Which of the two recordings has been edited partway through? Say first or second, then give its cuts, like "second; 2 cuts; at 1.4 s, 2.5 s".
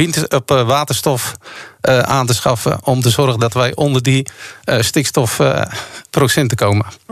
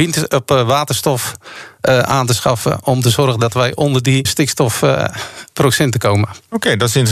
second; 1 cut; at 4.3 s